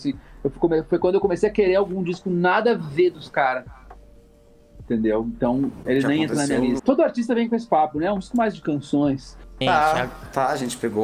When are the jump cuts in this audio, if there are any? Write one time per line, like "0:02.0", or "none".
0:06.8
0:09.6

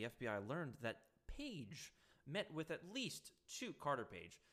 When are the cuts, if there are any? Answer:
none

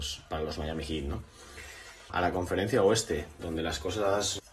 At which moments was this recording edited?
0:02.1

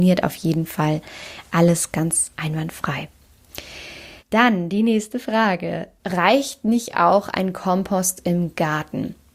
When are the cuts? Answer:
0:04.2
0:06.0

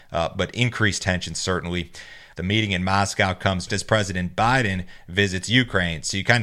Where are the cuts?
0:02.3
0:03.7

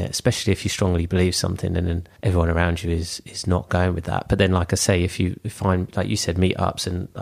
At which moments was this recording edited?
0:02.2

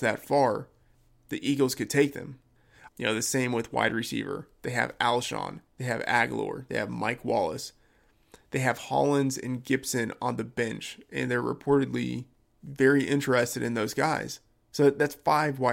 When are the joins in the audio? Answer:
0:02.9
0:05.7

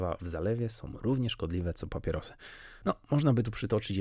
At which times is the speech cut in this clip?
0:02.8

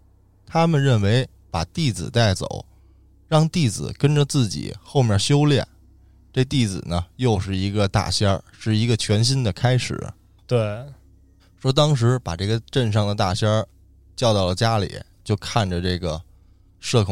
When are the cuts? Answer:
0:10.4
0:15.1

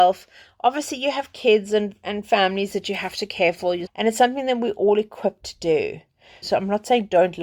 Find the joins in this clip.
0:03.9
0:06.4

